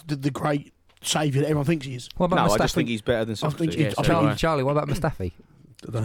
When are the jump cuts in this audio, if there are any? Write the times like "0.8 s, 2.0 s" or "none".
2.7 s